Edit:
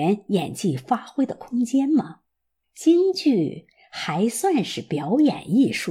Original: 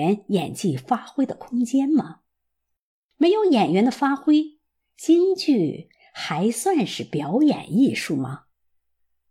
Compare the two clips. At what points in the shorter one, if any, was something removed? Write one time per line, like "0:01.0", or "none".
0:02.6